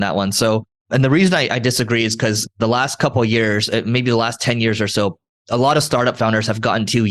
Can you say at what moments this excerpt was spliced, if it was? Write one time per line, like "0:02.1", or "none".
none